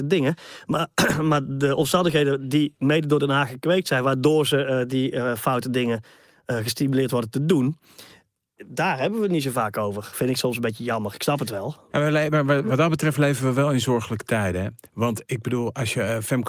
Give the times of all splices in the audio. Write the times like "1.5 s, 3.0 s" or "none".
none